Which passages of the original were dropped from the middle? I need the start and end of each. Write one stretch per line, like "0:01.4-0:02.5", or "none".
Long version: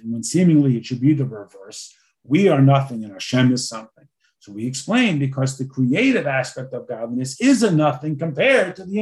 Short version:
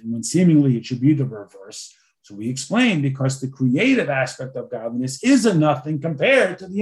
0:02.2-0:04.3